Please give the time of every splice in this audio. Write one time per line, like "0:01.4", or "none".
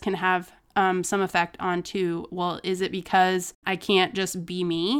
0:03.6